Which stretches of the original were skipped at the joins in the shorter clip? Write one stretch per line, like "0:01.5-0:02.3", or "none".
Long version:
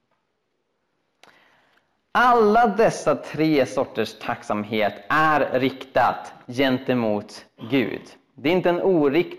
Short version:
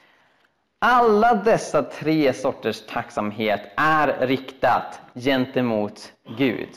none